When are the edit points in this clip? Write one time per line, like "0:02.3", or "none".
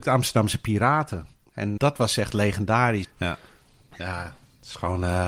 0:01.8
0:03.0